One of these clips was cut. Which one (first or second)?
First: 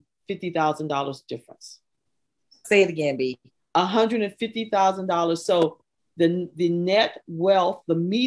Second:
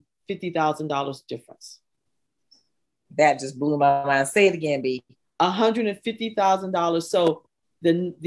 first